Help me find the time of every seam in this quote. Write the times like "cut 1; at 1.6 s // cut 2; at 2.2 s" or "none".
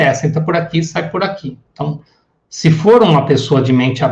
none